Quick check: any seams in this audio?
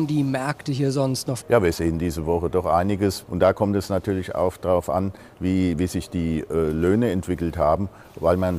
yes; 2 cuts; at 1.4 s, 3.2 s

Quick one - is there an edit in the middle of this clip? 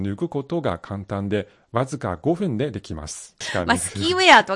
yes; 1 cut; at 3.4 s

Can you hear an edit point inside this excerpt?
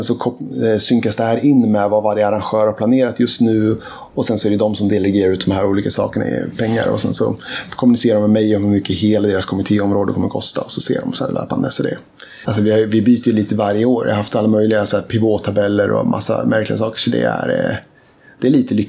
yes; 1 cut; at 12.4 s

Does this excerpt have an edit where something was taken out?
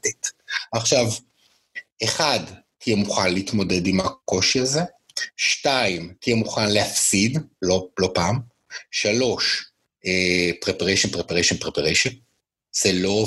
yes; 1 cut; at 1.9 s

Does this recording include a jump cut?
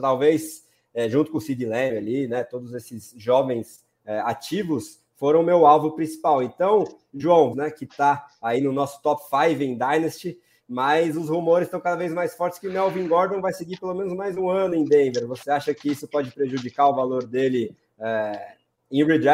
yes; 1 cut; at 7.5 s

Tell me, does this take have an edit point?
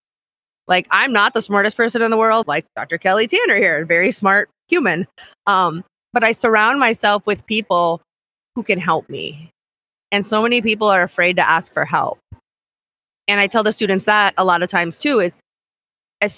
yes; 1 cut; at 2.4 s

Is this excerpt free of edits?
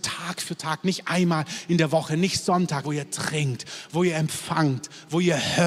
no; 1 cut; at 2.8 s

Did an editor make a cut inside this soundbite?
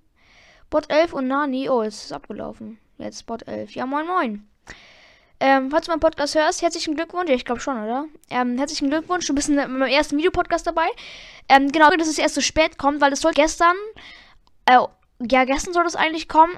yes; 2 cuts; at 11.9 s, 13.3 s

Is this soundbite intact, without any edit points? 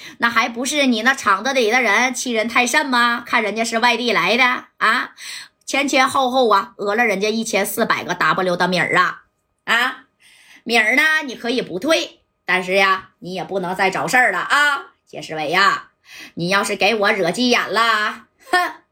yes; 0 cuts

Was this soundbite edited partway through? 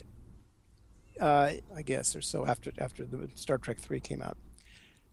yes; 1 cut; at 1.7 s

